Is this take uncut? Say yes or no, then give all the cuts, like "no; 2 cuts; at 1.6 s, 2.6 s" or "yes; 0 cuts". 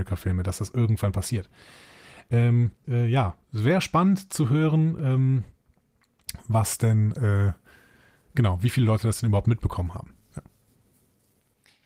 no; 1 cut; at 2.8 s